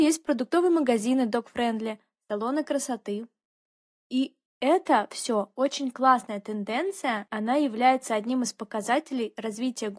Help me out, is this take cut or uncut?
uncut